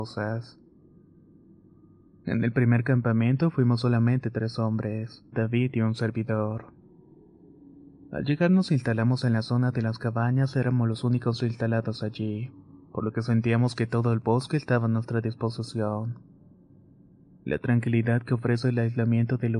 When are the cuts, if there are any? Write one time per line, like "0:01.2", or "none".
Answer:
0:05.3